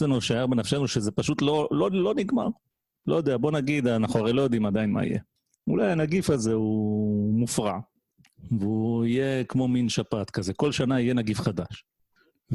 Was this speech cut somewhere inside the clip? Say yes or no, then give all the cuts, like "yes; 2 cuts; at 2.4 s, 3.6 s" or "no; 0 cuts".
no; 0 cuts